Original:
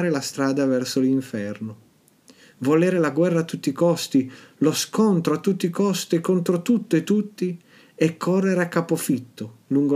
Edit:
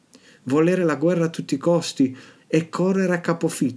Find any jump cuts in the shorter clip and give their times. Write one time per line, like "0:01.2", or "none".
0:02.4

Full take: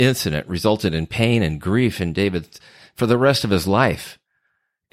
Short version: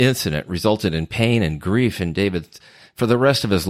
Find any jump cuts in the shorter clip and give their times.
none

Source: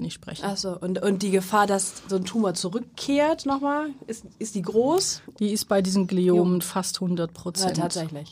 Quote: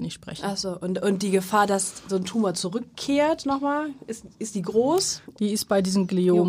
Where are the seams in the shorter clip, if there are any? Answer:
none

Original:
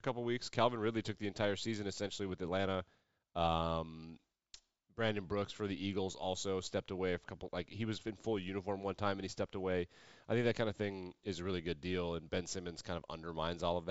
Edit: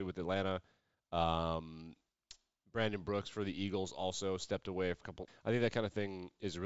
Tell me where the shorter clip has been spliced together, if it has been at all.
0:05.3

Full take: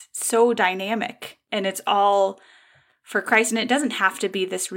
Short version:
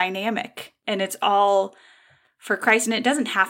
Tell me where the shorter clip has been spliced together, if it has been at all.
none

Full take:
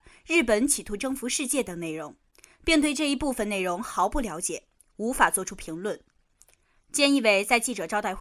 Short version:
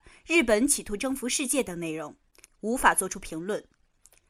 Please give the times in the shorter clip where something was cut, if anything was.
0:02.4

